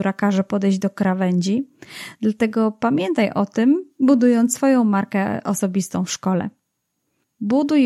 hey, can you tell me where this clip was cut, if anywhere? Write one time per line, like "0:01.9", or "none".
none